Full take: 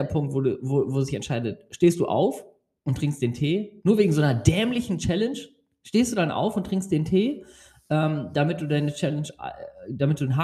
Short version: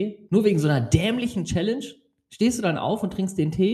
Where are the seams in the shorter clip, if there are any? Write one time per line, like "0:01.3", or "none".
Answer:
none